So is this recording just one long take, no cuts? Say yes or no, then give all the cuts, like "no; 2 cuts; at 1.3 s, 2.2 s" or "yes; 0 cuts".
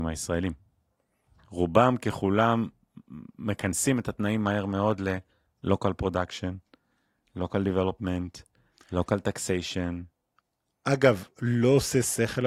yes; 0 cuts